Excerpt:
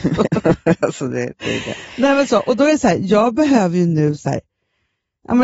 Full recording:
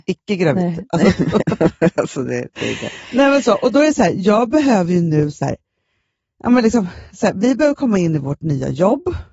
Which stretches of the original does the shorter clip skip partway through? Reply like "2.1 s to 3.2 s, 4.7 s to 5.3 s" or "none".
none